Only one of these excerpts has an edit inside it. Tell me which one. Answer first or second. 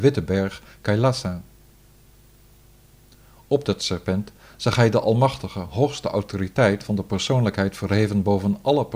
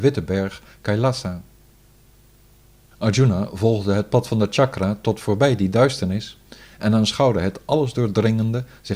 second